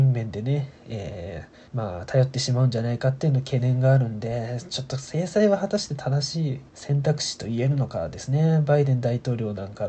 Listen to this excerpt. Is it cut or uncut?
cut